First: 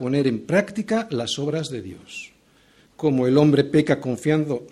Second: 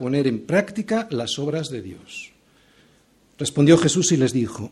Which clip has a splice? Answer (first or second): first